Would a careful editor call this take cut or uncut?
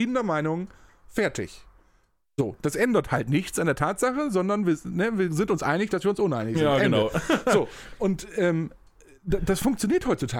uncut